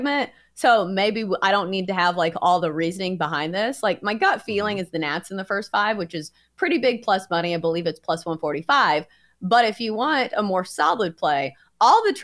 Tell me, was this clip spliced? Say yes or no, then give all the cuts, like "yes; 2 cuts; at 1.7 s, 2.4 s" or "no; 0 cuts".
no; 0 cuts